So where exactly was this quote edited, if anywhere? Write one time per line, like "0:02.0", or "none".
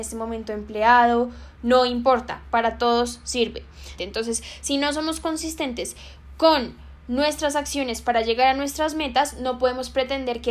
0:04.0